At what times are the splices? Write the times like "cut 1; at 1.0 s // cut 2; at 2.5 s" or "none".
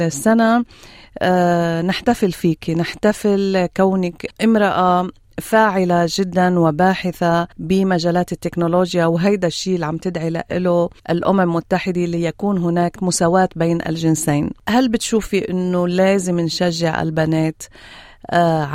cut 1; at 4.3 s // cut 2; at 7.5 s // cut 3; at 11.0 s